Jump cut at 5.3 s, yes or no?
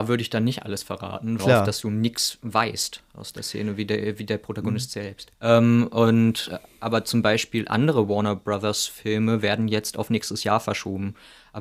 yes